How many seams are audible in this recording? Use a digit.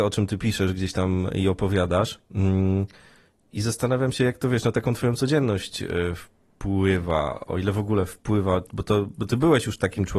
0